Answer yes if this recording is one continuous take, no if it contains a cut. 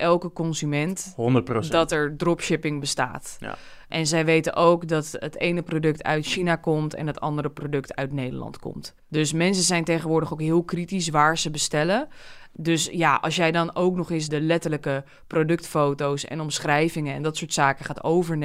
no